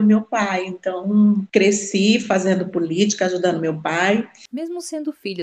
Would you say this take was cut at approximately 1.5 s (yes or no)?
yes